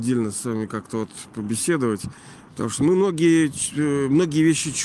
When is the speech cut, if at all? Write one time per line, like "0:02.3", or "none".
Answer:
0:02.5